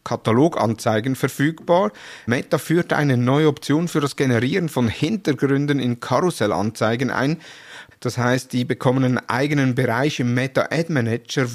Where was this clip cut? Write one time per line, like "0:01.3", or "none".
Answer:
0:02.3
0:07.9